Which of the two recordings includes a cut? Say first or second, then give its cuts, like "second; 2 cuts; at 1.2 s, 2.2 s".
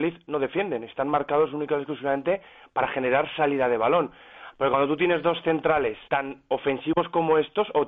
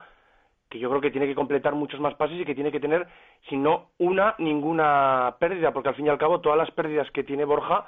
first; 2 cuts; at 4.5 s, 6.1 s